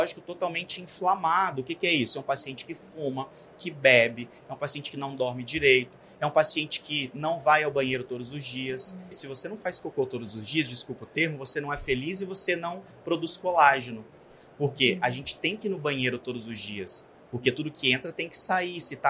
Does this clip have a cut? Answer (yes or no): yes